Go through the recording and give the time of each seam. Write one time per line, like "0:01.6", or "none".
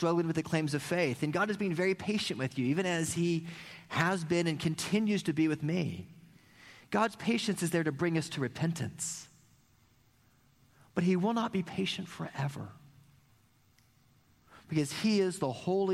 none